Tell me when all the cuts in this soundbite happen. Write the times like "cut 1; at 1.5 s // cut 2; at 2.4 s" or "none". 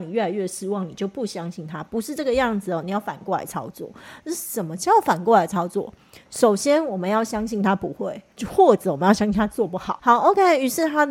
cut 1; at 10.0 s